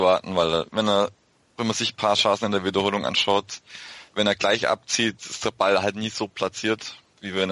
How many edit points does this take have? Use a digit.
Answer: 0